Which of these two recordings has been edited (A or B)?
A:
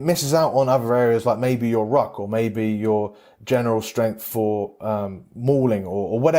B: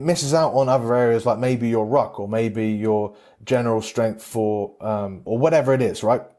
B